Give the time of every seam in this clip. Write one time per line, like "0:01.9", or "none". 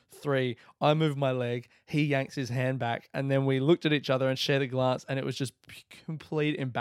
none